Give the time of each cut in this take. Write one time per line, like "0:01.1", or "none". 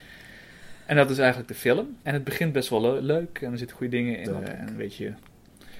0:02.0
0:04.2